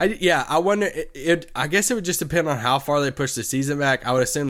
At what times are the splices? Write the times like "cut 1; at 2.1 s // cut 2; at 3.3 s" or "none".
none